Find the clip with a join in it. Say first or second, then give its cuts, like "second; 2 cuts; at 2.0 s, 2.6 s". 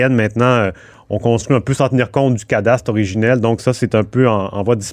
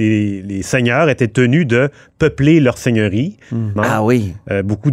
second; 1 cut; at 3.8 s